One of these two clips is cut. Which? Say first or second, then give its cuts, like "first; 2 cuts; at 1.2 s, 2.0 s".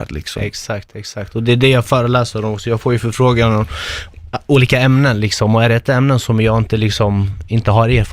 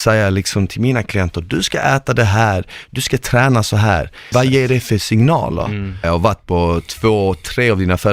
second; 2 cuts; at 4.3 s, 6.0 s